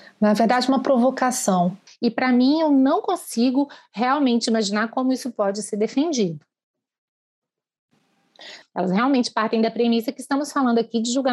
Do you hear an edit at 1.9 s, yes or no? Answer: yes